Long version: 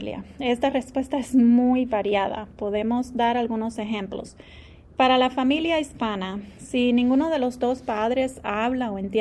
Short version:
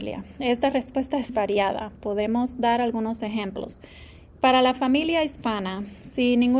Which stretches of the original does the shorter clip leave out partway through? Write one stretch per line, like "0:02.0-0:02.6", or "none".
0:01.3-0:01.9